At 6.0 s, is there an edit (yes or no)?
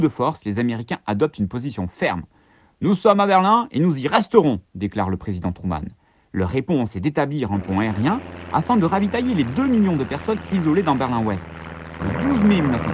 no